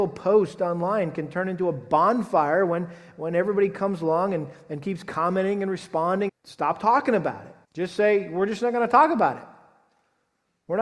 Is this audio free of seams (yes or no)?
no